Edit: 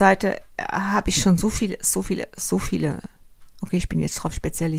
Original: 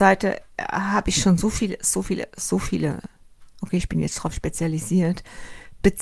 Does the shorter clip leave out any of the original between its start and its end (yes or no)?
no